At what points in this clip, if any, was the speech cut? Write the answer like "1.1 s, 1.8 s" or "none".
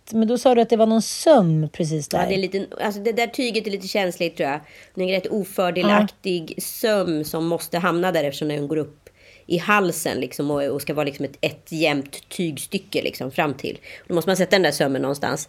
none